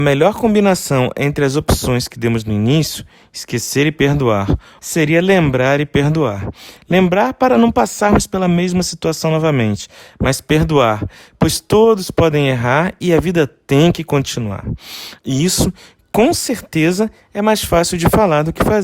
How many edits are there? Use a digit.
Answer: 2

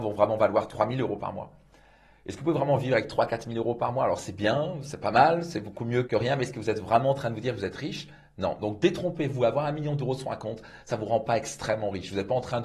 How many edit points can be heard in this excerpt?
1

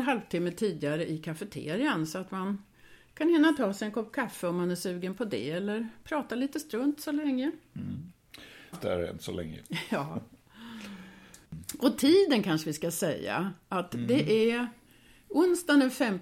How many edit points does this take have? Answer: 1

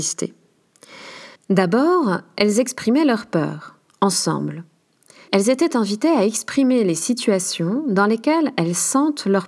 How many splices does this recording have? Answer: 2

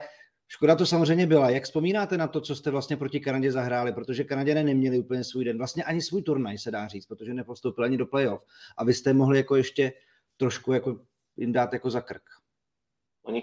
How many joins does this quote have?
0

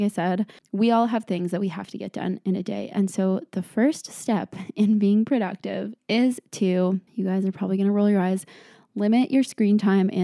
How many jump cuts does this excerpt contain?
2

